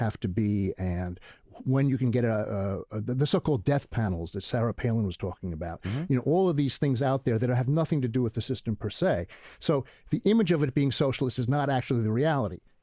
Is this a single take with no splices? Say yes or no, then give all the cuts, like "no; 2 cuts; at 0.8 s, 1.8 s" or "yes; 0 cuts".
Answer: yes; 0 cuts